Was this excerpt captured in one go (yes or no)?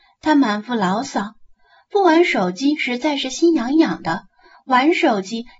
yes